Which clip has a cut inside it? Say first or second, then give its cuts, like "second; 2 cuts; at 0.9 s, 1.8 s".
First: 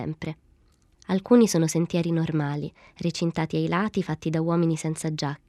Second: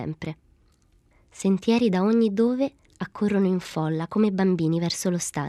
first; 1 cut; at 0.9 s